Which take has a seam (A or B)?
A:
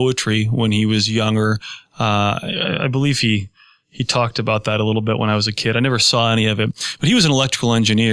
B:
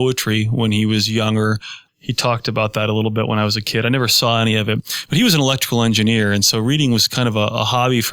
B